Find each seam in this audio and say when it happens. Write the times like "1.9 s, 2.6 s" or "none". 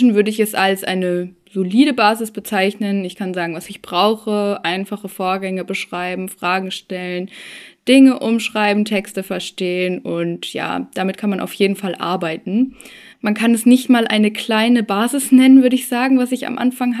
13.1 s